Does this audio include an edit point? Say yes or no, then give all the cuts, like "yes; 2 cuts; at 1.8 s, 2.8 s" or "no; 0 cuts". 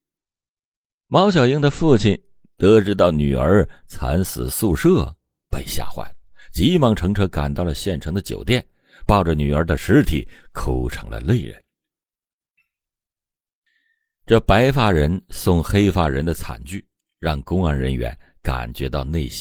no; 0 cuts